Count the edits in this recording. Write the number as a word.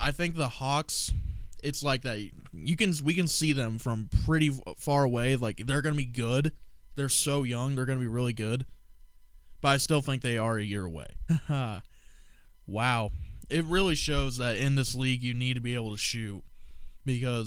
one